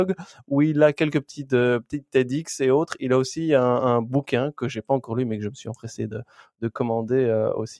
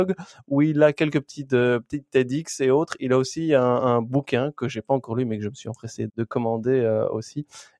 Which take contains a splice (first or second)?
second